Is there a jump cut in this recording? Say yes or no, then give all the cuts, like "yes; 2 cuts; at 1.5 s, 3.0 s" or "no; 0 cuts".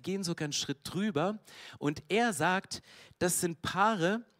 no; 0 cuts